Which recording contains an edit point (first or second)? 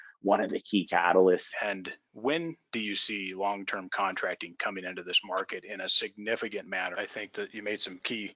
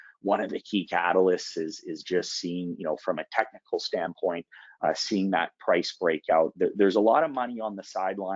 first